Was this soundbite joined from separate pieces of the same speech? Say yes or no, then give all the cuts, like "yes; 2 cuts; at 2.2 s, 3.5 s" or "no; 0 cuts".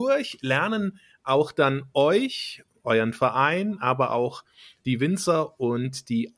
no; 0 cuts